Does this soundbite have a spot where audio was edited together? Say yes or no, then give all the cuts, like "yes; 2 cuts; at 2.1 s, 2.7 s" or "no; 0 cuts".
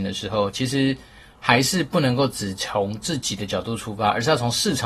no; 0 cuts